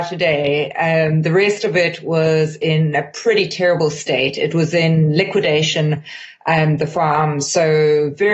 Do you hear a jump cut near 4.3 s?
no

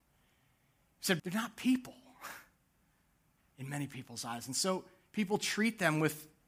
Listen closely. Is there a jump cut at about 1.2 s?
yes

